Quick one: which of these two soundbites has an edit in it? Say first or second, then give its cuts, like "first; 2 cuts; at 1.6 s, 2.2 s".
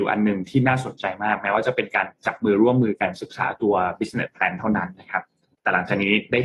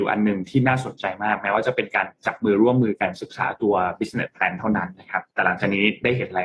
second; 1 cut; at 5.3 s